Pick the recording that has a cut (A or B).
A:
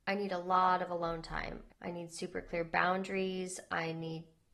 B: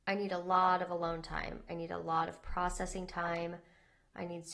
A